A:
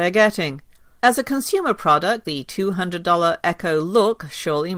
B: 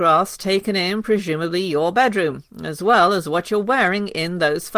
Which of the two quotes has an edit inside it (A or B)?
A